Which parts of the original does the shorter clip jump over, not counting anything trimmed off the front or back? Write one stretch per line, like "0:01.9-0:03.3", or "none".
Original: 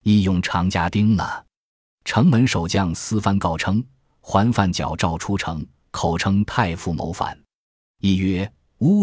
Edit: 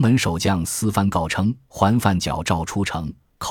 0:03.9-0:04.2